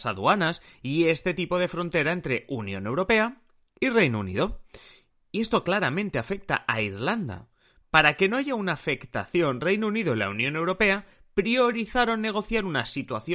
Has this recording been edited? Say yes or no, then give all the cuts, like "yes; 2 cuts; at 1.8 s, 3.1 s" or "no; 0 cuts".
no; 0 cuts